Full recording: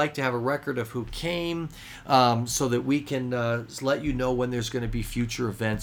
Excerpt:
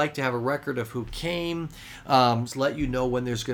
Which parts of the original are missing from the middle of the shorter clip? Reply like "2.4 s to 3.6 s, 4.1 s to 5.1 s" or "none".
2.5 s to 3.7 s

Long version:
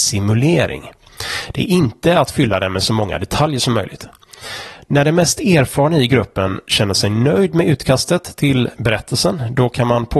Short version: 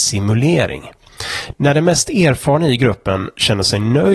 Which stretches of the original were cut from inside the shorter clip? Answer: 1.5 s to 4.8 s

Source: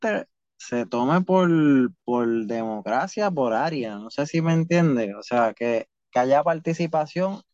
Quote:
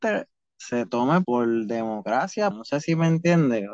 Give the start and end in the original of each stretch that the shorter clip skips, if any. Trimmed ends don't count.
1.2 s to 2.0 s, 3.3 s to 4.0 s

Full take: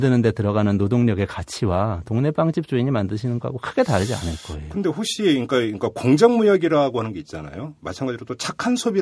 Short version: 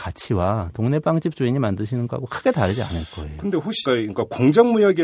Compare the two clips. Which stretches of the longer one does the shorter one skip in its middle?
5.2 s to 5.5 s

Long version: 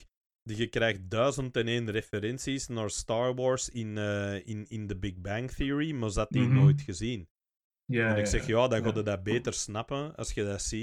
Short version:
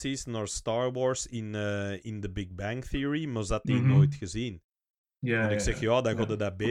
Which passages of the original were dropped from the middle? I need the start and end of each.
4.4 s to 4.7 s

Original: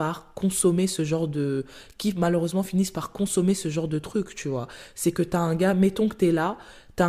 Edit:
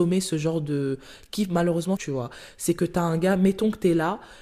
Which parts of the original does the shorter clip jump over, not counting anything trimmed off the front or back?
2.6 s to 4.3 s

